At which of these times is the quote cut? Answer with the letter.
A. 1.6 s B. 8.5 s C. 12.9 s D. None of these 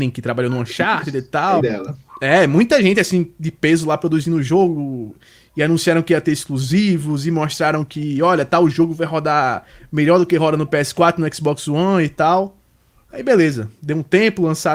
A